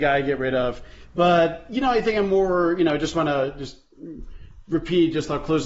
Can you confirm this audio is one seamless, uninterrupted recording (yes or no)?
yes